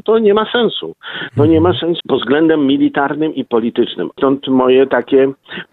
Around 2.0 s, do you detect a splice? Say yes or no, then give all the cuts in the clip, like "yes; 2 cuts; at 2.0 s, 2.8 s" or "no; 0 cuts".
yes; 1 cut; at 2.0 s